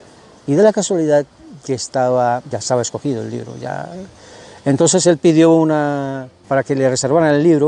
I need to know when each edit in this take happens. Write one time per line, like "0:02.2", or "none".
0:02.5
0:06.4